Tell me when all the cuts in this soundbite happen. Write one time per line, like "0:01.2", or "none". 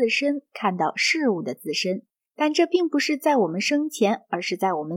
0:02.3